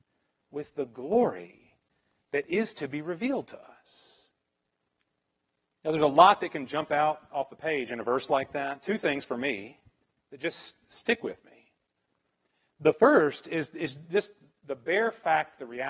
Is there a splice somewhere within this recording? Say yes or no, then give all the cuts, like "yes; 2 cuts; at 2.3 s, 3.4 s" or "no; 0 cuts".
no; 0 cuts